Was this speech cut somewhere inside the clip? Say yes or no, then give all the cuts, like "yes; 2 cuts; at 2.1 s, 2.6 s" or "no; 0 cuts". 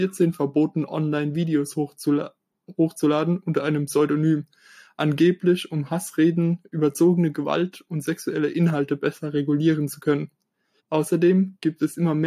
yes; 1 cut; at 10.8 s